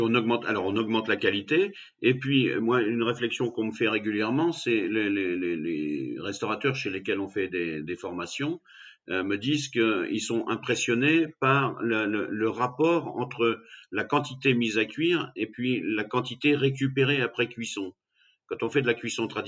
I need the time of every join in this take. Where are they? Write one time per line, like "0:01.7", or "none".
none